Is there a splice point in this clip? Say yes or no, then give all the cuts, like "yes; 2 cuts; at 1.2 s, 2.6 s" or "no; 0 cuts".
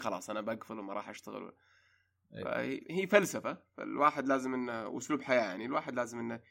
yes; 1 cut; at 2.8 s